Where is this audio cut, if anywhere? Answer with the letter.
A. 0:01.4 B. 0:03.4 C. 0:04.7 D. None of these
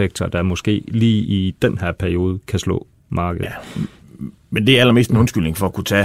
D